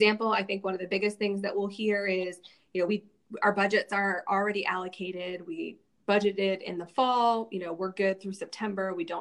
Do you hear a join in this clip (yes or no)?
no